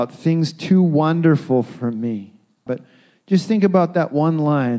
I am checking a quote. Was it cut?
yes; 1 cut; at 2.7 s

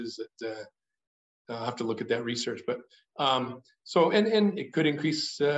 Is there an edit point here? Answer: no; 0 cuts

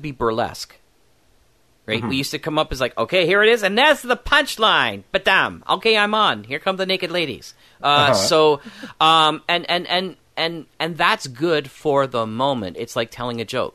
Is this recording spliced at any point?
no; 0 cuts

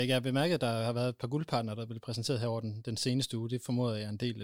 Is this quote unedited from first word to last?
yes; 0 cuts

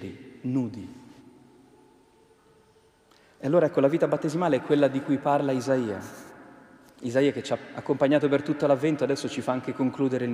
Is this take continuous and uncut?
yes; 0 cuts

